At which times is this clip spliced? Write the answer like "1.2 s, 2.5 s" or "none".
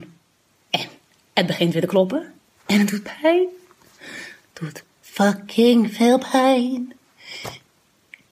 none